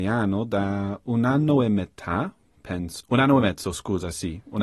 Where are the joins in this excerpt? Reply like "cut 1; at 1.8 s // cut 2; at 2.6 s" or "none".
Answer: cut 1; at 3.0 s

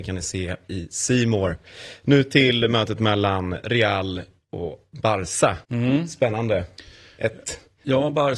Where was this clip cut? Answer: cut 1; at 5.6 s

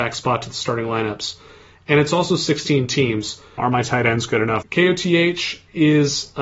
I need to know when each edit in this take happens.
cut 1; at 3.6 s // cut 2; at 4.6 s

